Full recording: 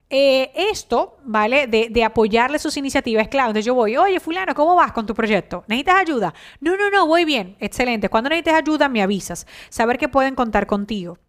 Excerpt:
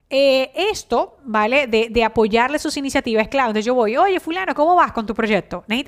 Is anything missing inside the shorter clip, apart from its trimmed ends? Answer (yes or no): no